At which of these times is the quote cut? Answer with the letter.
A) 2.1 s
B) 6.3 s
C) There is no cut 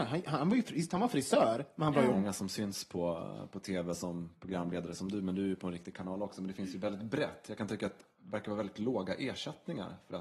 A